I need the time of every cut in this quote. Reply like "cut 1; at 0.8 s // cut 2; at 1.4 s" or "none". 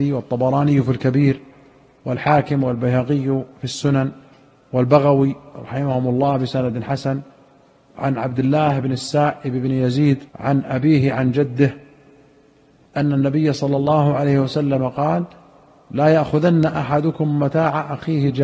cut 1; at 10.3 s